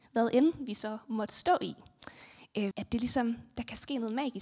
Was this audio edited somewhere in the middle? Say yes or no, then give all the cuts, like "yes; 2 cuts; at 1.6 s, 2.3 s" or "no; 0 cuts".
yes; 1 cut; at 2.7 s